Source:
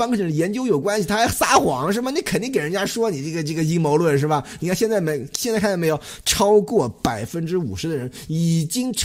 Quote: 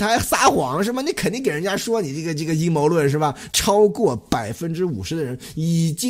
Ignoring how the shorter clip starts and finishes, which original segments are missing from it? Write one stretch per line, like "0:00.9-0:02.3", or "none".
0:04.6-0:06.2